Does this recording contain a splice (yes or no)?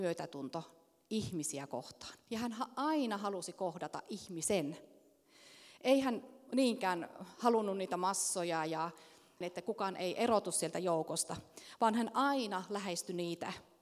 yes